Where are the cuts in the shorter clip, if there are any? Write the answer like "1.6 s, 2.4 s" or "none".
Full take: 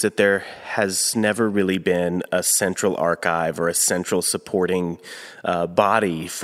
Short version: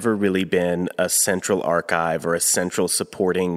none